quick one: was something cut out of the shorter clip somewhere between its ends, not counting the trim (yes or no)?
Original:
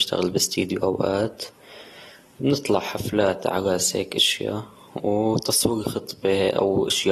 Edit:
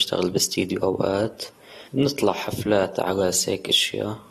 yes